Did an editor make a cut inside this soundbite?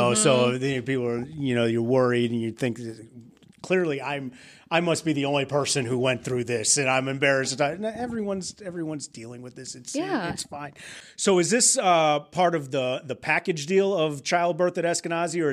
no; 0 cuts

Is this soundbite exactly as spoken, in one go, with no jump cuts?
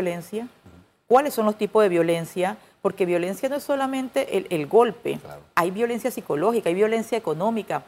yes; 0 cuts

